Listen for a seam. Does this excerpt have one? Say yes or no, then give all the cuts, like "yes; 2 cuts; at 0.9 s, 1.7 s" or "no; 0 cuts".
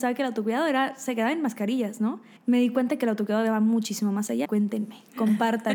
yes; 2 cuts; at 2.4 s, 4.4 s